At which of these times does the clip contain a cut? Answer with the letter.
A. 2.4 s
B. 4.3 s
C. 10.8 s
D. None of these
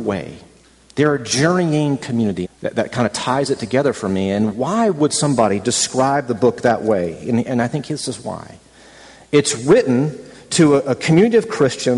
A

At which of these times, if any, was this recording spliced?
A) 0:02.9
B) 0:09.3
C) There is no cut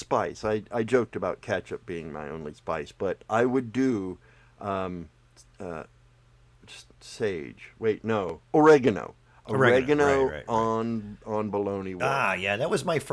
C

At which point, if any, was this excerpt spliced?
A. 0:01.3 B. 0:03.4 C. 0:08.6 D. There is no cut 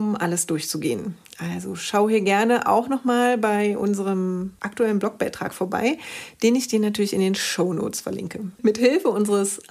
C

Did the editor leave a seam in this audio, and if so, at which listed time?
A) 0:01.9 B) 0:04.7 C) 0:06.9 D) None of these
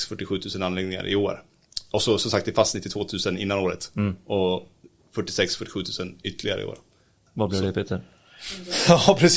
D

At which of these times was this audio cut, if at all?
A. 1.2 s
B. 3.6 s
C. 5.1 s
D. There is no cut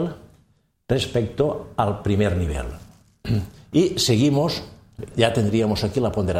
C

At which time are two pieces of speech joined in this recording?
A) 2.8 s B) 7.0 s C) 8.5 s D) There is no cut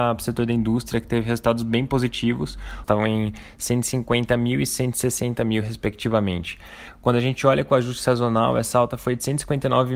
A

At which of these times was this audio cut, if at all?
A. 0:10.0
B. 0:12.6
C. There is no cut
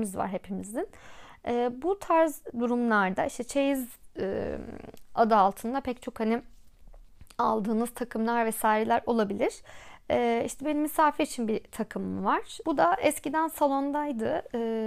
B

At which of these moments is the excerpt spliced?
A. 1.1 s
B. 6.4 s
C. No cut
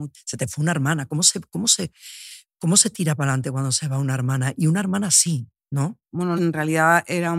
B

